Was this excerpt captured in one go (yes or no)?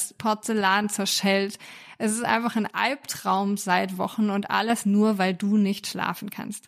yes